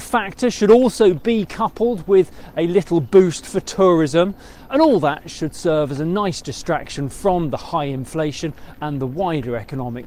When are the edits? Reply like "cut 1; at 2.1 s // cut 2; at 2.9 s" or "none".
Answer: cut 1; at 4.7 s